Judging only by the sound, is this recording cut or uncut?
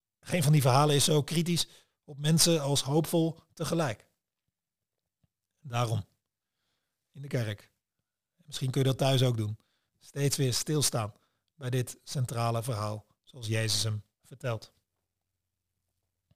uncut